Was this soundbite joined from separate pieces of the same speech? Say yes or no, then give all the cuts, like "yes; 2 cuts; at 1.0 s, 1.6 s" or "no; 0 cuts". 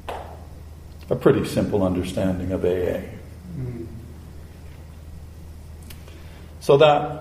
no; 0 cuts